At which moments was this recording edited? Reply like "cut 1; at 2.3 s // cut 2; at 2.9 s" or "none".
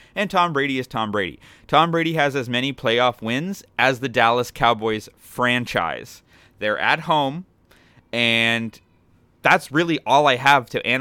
none